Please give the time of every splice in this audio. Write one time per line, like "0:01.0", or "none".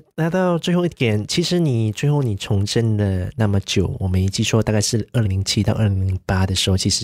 0:05.2